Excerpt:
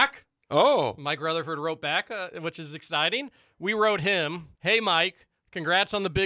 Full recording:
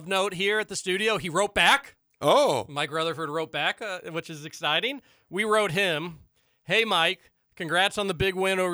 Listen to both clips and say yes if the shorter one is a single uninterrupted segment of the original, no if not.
no